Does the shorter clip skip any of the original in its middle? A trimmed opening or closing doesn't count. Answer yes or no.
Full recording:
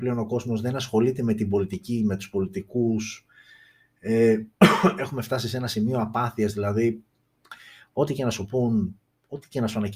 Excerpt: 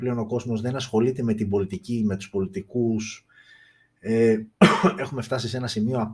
no